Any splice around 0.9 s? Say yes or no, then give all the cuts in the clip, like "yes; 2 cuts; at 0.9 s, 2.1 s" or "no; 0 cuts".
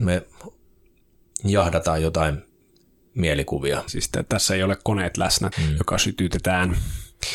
no; 2 cuts; at 3.9 s, 5.5 s